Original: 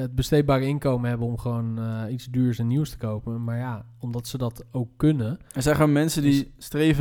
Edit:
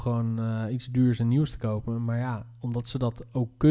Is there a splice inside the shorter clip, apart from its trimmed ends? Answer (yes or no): no